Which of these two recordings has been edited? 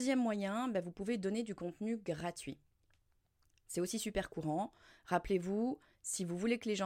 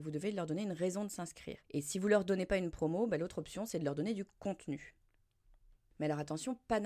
second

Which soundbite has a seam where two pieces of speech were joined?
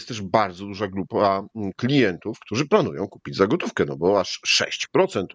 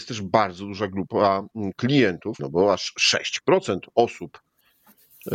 second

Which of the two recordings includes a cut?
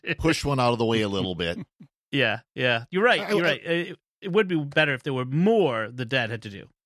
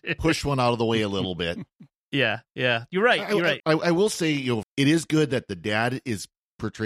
second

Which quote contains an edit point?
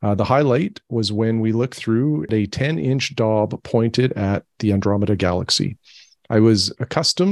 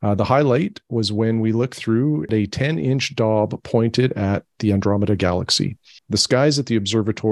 second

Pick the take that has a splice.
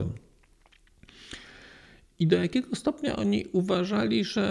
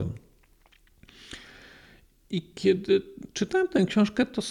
first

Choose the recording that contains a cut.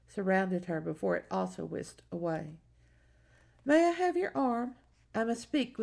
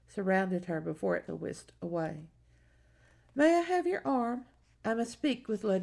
second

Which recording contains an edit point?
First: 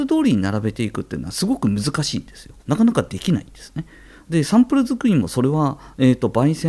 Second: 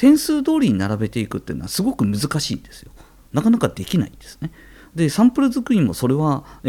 first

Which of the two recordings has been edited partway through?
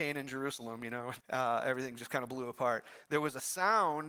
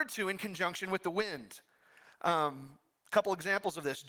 first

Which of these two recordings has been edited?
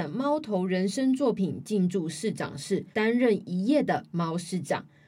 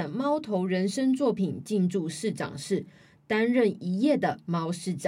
first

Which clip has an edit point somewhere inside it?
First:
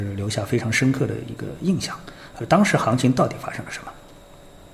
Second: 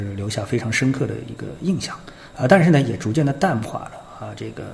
first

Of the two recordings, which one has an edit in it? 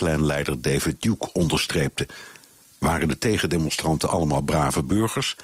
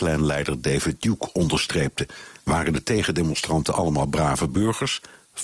second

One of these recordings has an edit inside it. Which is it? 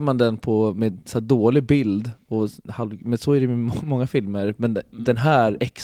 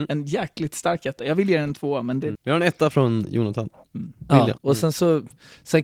second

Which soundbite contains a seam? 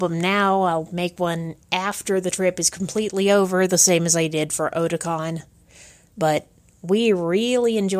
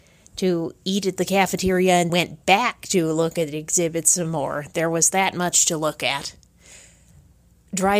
second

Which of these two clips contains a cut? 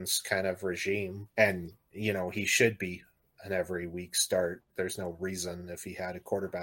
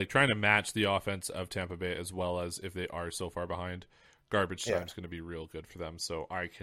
first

